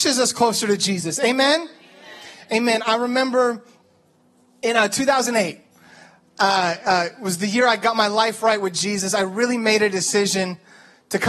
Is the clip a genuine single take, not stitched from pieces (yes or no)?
yes